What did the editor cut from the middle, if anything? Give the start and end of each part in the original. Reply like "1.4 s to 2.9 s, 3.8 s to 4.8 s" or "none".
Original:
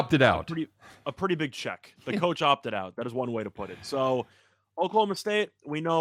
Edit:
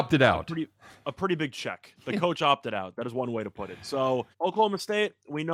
4.3 s to 4.7 s